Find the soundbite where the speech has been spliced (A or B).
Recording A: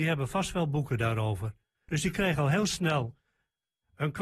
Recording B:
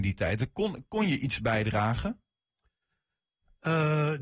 A